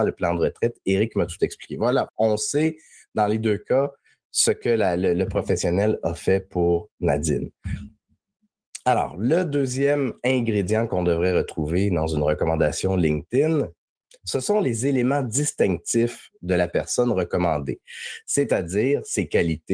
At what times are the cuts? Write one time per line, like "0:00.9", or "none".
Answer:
0:02.1